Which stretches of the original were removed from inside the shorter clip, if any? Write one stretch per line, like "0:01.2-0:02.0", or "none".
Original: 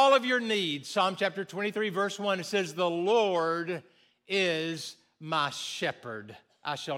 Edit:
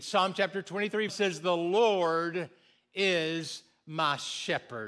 0:01.9-0:02.4